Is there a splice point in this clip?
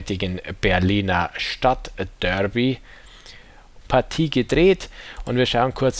yes; 1 cut; at 3.8 s

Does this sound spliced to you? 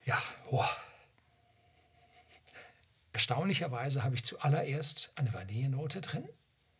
no; 0 cuts

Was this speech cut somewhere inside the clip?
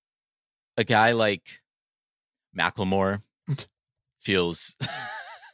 no; 0 cuts

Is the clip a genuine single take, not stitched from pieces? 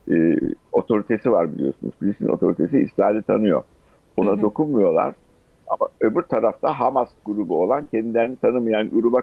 yes; 0 cuts

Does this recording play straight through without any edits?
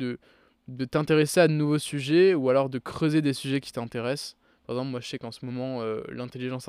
yes; 0 cuts

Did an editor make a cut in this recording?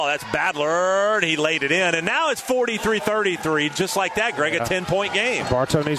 no; 0 cuts

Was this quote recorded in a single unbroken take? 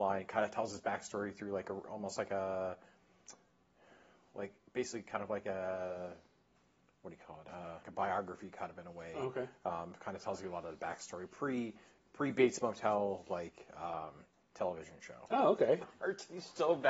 no; 2 cuts; at 7.8 s, 15.8 s

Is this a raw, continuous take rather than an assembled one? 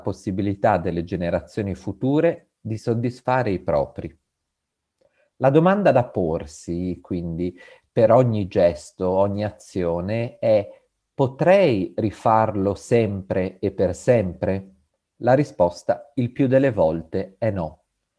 yes; 0 cuts

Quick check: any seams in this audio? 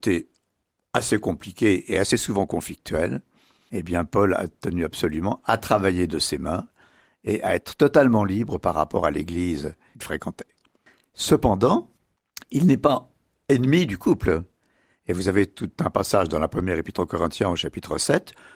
no; 0 cuts

